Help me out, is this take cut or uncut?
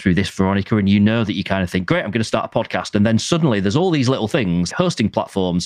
cut